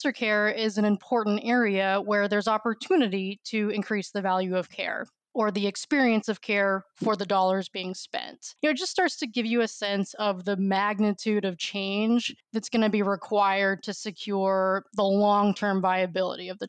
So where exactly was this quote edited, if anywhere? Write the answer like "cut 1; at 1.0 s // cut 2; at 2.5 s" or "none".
cut 1; at 8.6 s